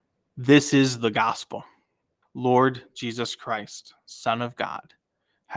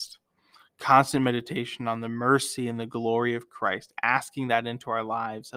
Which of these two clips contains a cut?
first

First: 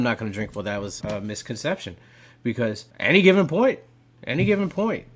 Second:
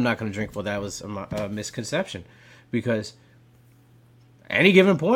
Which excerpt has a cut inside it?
first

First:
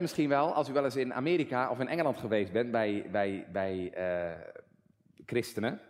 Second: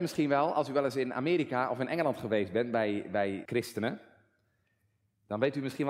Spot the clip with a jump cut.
second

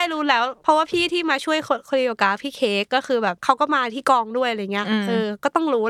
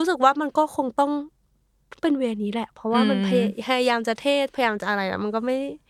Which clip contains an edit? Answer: first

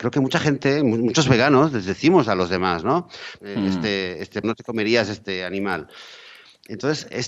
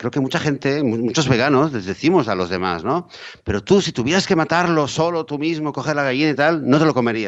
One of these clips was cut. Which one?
first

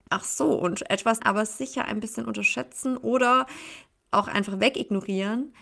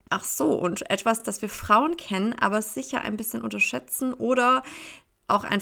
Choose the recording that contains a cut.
first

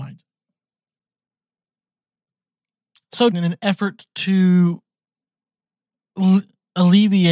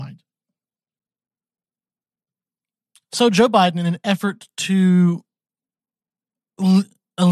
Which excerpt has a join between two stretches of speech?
first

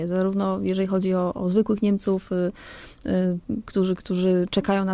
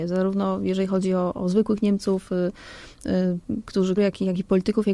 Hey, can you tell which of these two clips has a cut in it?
second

